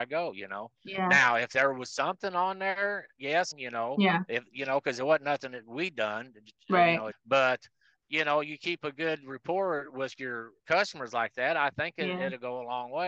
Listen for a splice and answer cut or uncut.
cut